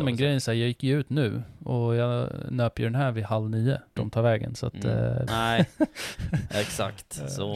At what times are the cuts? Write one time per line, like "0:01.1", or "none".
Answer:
0:04.0
0:05.3